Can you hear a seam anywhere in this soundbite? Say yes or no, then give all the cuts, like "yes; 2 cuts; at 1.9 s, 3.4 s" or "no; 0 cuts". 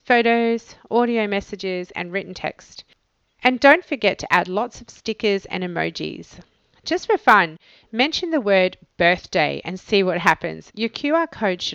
yes; 2 cuts; at 7.8 s, 10.7 s